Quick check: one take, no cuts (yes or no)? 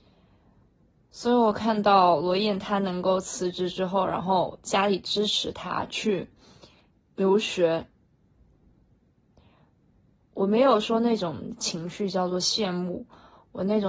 yes